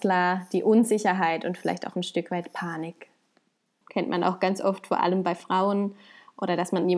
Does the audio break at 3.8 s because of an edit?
yes; 1 cut; at 3.8 s

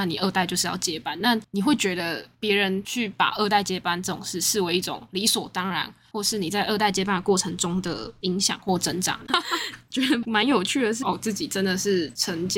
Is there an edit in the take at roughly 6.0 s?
no; 2 cuts; at 9.3 s, 11.0 s

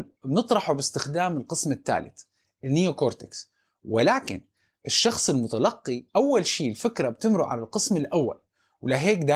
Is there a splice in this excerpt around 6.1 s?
yes; 1 cut; at 6.1 s

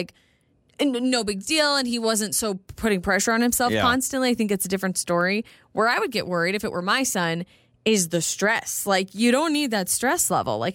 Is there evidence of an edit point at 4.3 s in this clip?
no; 0 cuts

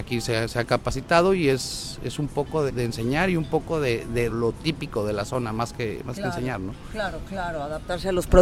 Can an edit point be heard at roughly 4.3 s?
yes; 2 cuts; at 2.7 s, 4.3 s

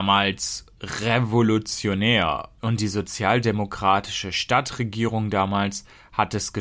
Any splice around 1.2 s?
no; 1 cut; at 2.6 s

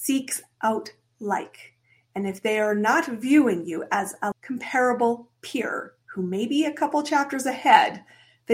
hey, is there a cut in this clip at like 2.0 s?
no; 2 cuts; at 4.3 s, 6.0 s

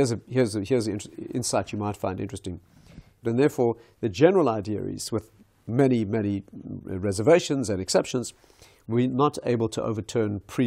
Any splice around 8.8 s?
no; 1 cut; at 3.2 s

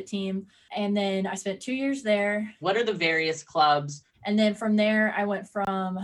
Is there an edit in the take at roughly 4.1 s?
yes; 2 cuts; at 2.6 s, 4.1 s

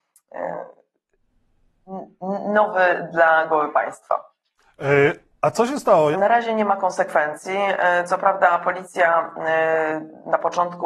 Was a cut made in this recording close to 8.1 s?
no; 1 cut; at 6.1 s

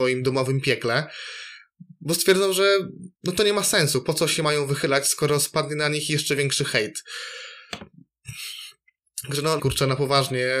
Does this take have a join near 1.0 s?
no; 2 cuts; at 3.1 s, 9.6 s

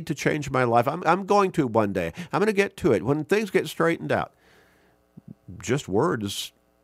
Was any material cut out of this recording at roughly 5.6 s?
no; 1 cut; at 1.0 s

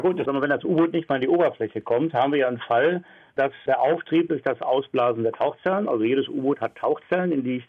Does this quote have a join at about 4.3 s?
yes; 1 cut; at 4.3 s

